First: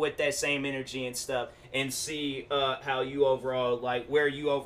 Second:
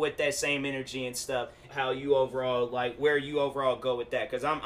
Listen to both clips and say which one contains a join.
second; 1 cut; at 1.7 s

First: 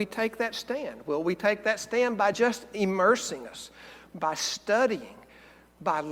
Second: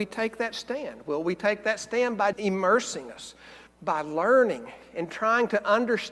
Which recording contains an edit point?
second; 2 cuts; at 2.3 s, 3.7 s

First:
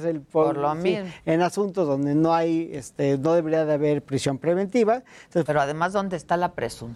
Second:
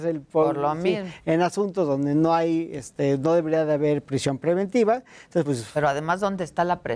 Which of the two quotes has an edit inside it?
first; 1 cut; at 5.5 s

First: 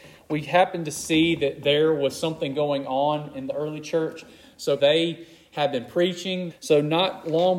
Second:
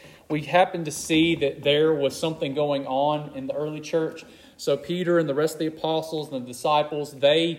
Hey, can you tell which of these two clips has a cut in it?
first; 2 cuts; at 4.8 s, 6.5 s

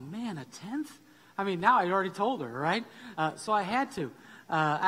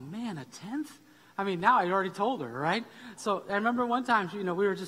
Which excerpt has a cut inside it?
second; 1 cut; at 3.2 s

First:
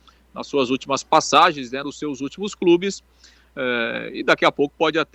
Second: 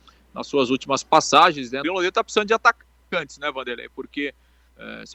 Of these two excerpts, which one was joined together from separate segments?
second; 1 cut; at 1.8 s

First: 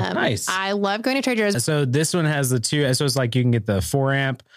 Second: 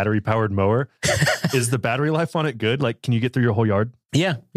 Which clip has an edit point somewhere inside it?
first; 1 cut; at 1.5 s

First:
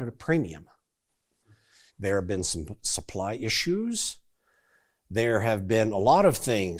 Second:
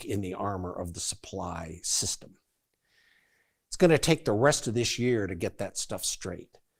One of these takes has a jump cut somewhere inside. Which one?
first; 1 cut; at 1.9 s

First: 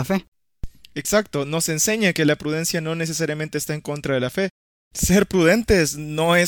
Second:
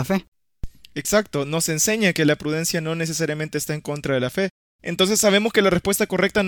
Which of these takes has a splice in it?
second; 1 cut; at 4.6 s

